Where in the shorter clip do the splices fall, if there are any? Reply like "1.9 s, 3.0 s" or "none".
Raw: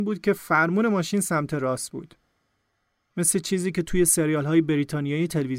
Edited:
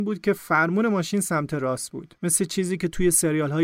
2.2 s